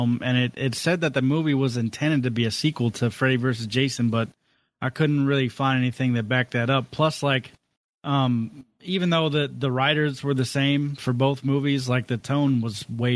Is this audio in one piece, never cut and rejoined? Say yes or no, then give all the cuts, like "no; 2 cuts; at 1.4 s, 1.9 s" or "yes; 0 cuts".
yes; 0 cuts